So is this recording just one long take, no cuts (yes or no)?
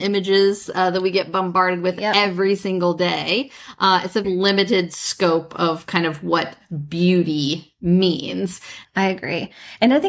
no